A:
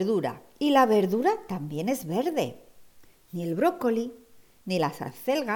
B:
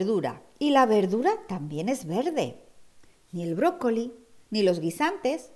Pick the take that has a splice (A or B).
B